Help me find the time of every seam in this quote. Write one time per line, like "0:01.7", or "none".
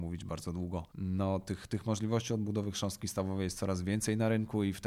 0:00.9